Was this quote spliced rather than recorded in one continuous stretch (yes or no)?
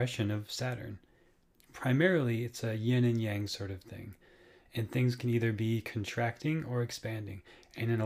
yes